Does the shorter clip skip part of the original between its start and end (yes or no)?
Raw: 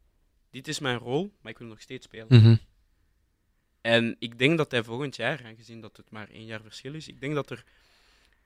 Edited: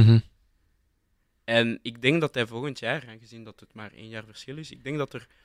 no